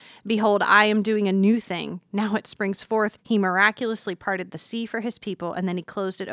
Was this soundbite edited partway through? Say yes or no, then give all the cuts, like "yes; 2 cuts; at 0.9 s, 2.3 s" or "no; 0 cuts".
yes; 1 cut; at 3.2 s